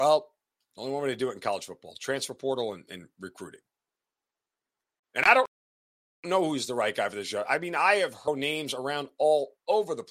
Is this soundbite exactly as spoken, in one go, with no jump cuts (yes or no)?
yes